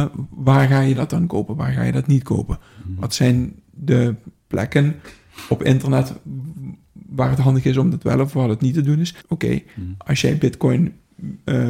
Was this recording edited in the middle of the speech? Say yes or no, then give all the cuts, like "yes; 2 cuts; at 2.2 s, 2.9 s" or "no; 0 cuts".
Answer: yes; 2 cuts; at 4.4 s, 9.2 s